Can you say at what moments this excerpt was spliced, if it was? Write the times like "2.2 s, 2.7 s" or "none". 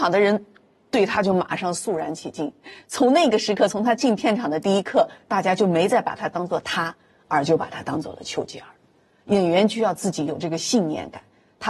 none